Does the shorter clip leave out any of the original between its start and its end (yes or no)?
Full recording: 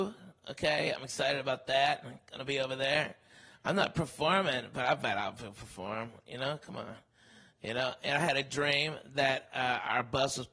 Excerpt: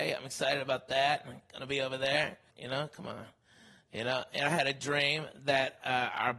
yes